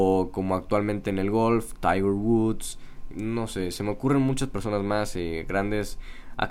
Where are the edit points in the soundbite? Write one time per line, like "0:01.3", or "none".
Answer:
0:03.1

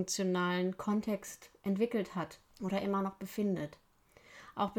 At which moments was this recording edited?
0:02.5

